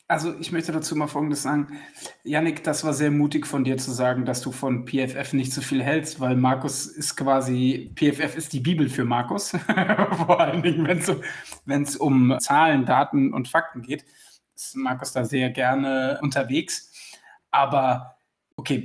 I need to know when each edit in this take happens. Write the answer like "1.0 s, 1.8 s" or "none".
12.4 s, 16.2 s

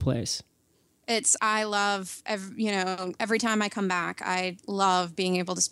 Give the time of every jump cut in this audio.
1.4 s

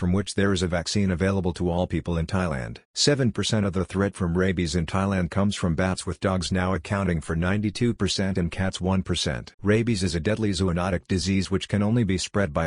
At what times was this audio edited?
2.8 s, 9.5 s

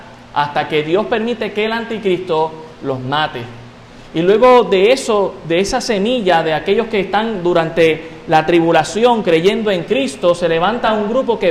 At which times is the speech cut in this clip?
none

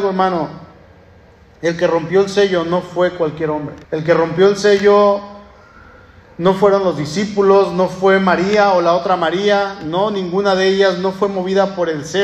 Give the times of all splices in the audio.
3.8 s

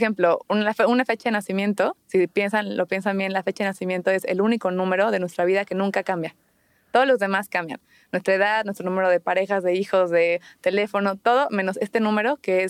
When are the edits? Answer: none

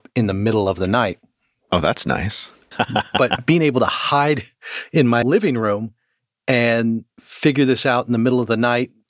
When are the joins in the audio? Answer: 2.7 s, 5.2 s, 7.1 s

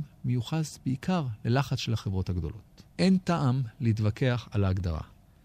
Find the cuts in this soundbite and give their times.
2.9 s

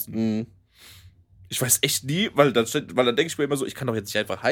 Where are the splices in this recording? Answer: none

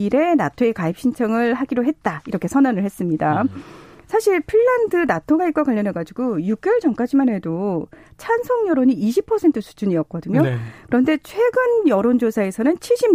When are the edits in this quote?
none

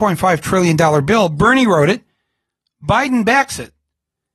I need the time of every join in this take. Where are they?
none

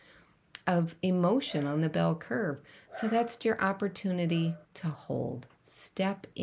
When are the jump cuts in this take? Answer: 3.4 s, 4.6 s

